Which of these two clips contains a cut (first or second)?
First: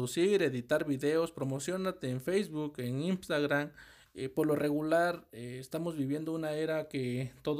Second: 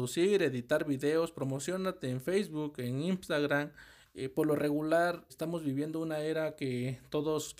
second